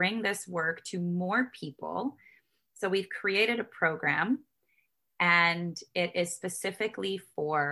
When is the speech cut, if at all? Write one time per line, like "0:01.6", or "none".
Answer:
none

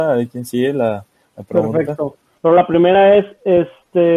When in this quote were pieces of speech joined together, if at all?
0:02.4

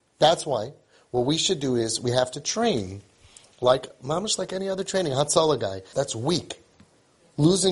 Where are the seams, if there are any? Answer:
0:05.9

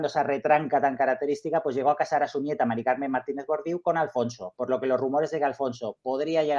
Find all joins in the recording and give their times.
none

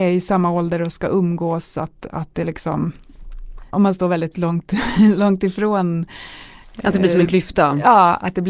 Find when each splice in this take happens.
0:03.7

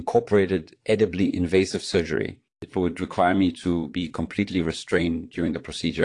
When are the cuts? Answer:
0:02.5

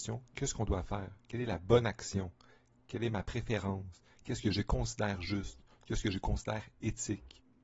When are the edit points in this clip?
none

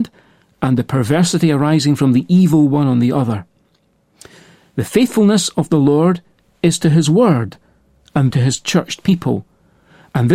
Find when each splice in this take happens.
0:08.3

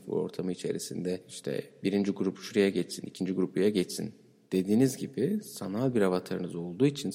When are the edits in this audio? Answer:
none

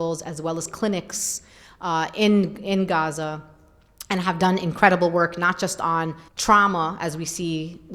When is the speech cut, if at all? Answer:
0:06.3

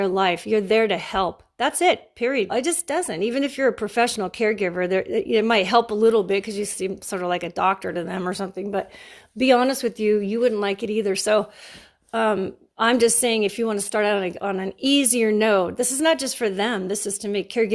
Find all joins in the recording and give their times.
0:02.5

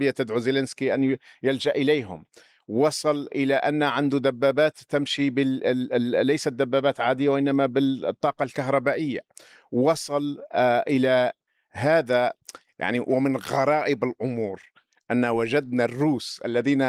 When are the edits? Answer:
none

